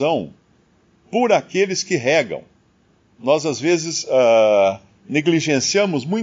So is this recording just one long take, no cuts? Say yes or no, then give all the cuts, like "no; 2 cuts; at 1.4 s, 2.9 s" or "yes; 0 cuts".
yes; 0 cuts